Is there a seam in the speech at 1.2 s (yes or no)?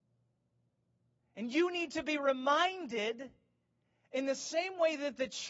no